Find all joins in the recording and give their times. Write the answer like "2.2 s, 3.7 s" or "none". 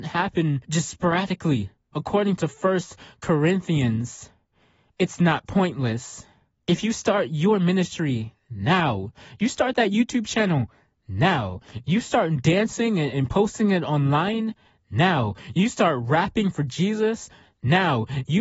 1.9 s, 6.6 s